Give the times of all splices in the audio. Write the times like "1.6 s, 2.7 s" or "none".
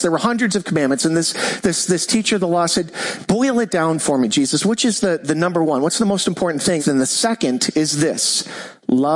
6.8 s